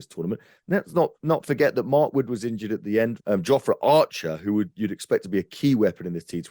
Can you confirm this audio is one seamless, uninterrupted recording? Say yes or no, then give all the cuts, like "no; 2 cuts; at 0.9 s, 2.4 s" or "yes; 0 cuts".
no; 1 cut; at 3.2 s